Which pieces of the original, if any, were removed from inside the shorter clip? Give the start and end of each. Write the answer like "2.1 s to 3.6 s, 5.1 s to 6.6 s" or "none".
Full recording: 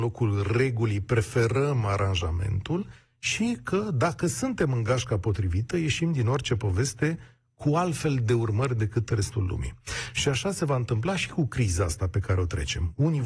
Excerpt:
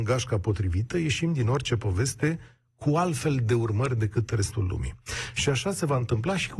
none